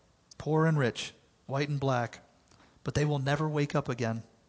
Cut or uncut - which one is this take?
uncut